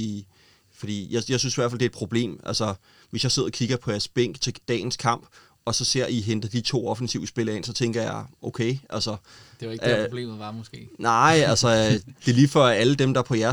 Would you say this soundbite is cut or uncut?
uncut